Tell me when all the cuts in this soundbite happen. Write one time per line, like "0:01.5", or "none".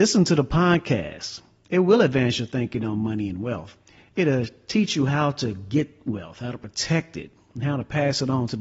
none